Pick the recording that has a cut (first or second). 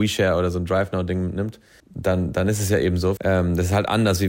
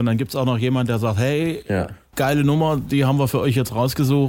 first